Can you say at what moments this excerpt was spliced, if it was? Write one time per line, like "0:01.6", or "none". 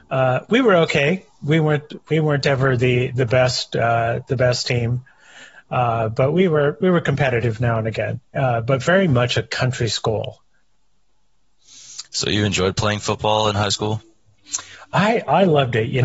none